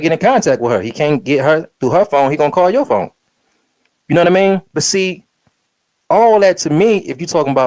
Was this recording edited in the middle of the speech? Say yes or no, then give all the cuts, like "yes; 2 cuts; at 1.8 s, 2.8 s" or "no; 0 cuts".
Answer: no; 0 cuts